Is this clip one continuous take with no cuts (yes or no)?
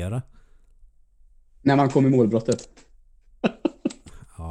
yes